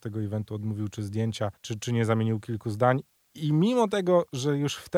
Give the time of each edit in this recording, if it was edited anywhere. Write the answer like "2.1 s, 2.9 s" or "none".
1.6 s